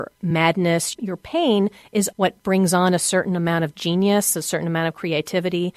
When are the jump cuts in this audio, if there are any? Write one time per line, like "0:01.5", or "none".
0:00.9
0:02.1